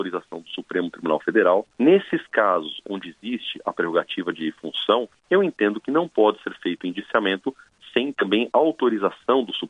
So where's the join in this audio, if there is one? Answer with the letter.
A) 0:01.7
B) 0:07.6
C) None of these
A